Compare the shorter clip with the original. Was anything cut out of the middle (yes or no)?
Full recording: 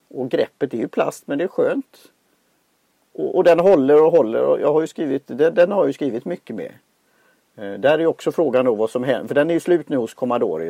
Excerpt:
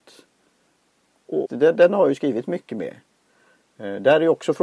yes